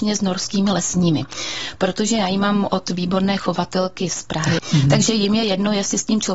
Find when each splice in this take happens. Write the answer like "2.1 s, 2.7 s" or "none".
4.6 s